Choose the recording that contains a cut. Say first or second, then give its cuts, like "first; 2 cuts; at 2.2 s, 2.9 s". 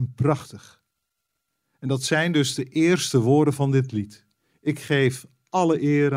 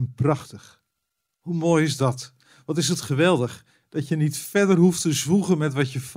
second; 1 cut; at 1.3 s